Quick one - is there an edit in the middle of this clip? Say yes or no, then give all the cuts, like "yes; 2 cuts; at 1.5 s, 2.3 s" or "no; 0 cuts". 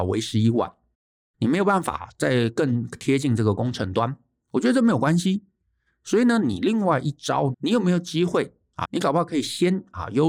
yes; 2 cuts; at 7.5 s, 8.8 s